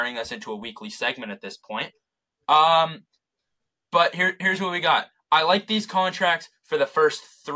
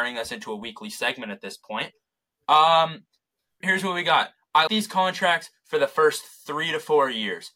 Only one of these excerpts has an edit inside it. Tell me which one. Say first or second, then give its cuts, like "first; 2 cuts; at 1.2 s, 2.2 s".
second; 2 cuts; at 3.6 s, 4.7 s